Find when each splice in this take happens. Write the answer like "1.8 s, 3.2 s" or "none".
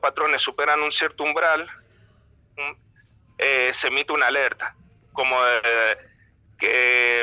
none